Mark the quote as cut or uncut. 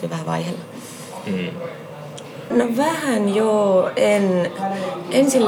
cut